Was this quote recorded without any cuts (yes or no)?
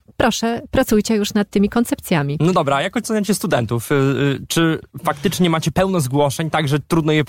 yes